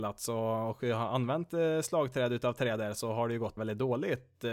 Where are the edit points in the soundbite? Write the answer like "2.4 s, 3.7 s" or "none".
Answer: 3.6 s